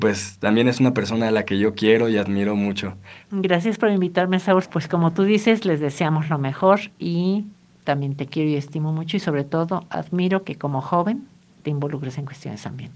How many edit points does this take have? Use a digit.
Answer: 2